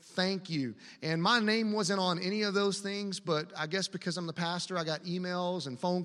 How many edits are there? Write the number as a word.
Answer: zero